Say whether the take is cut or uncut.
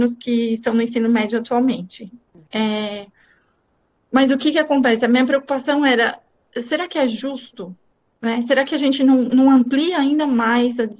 uncut